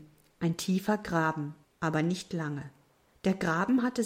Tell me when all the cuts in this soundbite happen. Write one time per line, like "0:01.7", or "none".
0:01.6

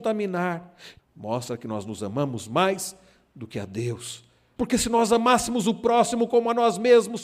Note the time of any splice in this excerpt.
0:01.0
0:04.6

